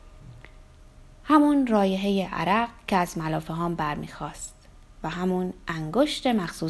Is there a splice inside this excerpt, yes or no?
no